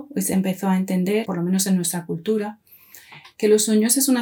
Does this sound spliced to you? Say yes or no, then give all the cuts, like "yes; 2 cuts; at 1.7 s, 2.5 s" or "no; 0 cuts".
yes; 1 cut; at 1.2 s